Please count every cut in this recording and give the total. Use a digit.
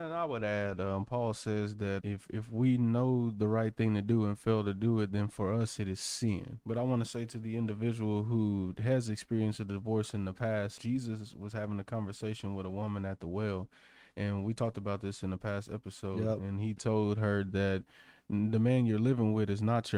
3